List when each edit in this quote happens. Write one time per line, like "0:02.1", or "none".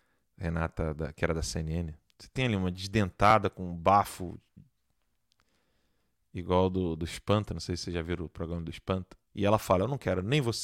0:02.1
0:09.3